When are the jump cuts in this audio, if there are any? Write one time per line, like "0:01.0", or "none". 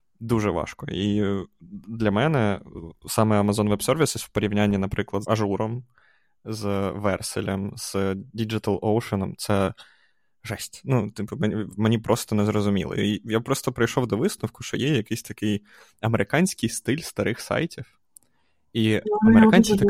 0:05.2